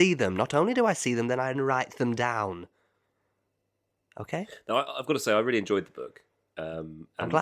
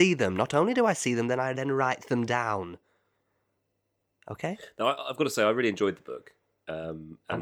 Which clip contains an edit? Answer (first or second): first